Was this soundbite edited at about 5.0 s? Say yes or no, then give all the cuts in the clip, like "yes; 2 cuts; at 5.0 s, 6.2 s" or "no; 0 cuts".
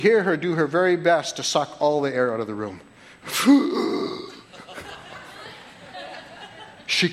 no; 1 cut; at 3.2 s